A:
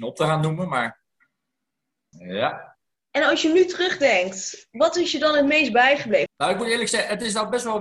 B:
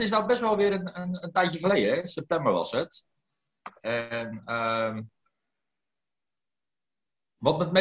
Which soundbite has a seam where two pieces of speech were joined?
A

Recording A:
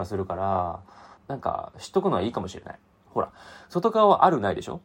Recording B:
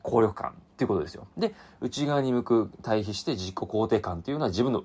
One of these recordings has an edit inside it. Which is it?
A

